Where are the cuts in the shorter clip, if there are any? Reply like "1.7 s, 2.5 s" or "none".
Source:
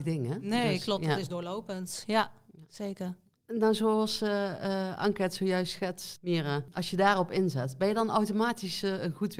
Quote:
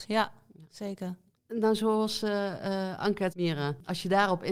3.3 s